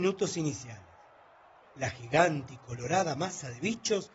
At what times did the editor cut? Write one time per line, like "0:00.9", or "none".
0:01.6